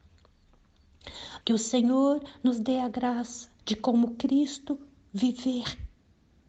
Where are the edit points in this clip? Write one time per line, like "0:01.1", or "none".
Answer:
0:01.4
0:03.6